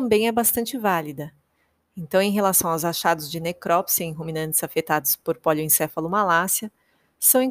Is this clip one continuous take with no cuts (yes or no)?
yes